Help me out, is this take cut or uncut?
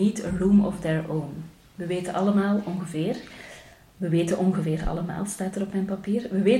uncut